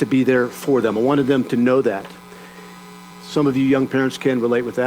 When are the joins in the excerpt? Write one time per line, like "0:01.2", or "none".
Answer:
0:03.1